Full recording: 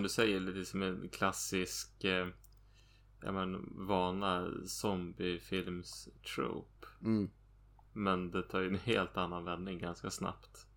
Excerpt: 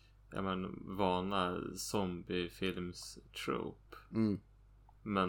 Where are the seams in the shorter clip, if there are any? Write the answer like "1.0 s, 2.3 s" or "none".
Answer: none